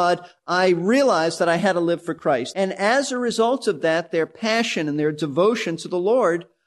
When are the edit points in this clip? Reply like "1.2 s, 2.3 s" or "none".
2.5 s